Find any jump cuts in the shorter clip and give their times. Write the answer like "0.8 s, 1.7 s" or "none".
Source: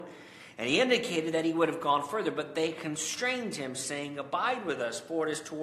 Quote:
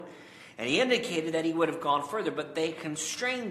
none